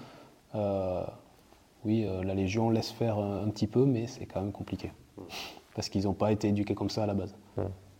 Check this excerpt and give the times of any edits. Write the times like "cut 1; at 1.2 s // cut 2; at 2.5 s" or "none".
none